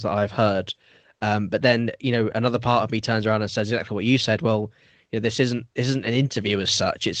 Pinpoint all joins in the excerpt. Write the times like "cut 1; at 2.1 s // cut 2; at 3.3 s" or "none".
none

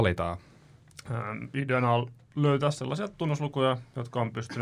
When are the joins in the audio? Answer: none

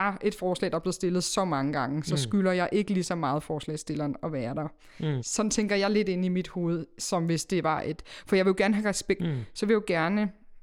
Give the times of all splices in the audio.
cut 1; at 5.2 s // cut 2; at 9.2 s

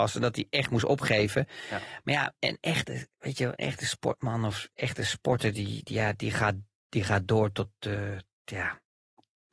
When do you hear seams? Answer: cut 1; at 2.4 s

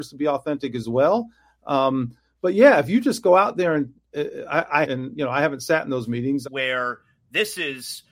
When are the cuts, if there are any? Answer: cut 1; at 4.8 s // cut 2; at 6.4 s

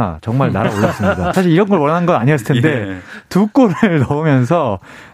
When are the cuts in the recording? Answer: cut 1; at 1.3 s

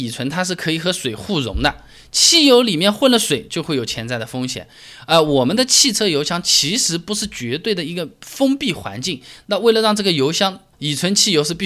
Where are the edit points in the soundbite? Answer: cut 1; at 10.7 s

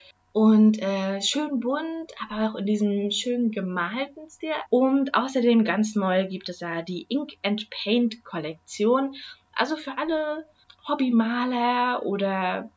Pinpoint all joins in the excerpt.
cut 1; at 4.7 s

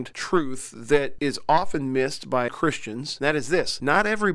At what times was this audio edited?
cut 1; at 2.5 s

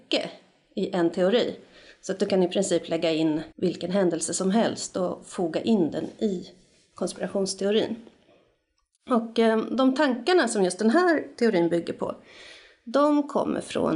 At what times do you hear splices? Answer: cut 1; at 3.5 s

